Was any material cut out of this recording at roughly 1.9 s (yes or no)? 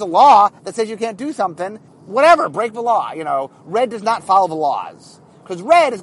yes